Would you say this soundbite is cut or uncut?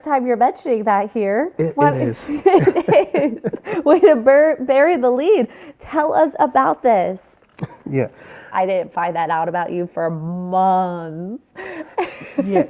cut